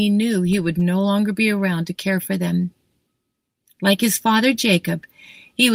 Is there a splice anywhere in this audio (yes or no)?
no